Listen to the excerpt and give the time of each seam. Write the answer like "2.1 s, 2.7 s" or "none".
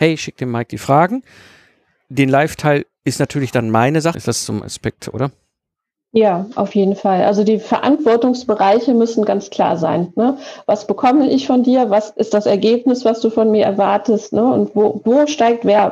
4.1 s, 14.7 s